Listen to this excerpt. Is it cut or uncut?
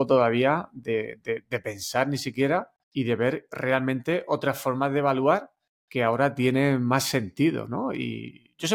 cut